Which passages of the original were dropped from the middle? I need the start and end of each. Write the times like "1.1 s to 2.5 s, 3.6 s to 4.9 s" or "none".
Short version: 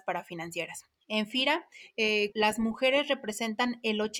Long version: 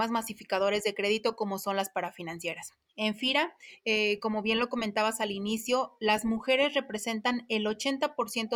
4.2 s to 6.0 s